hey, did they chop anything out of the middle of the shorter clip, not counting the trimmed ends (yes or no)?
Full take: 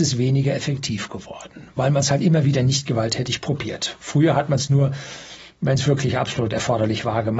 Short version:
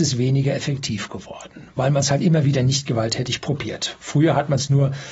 no